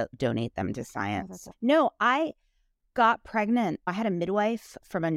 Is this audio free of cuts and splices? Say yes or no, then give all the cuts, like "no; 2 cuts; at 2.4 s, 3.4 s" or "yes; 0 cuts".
yes; 0 cuts